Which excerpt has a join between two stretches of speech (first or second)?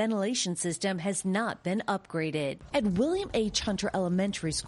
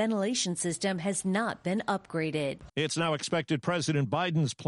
second